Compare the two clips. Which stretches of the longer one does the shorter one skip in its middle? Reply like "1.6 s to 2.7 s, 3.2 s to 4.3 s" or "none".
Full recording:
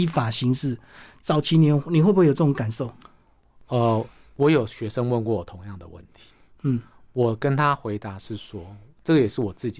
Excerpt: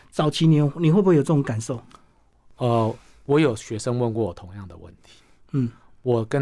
none

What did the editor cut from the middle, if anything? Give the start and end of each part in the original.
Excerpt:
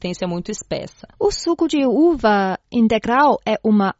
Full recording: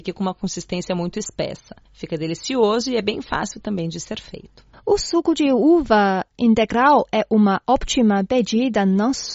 1.8 s to 4.8 s

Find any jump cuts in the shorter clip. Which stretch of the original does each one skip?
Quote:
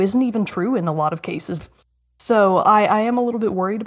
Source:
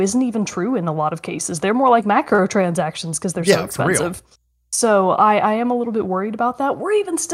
1.6 s to 4.1 s

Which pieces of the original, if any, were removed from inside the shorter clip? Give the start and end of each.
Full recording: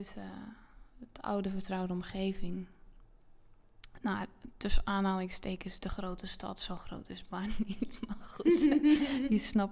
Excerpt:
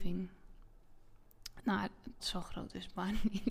4.6 s to 6.5 s

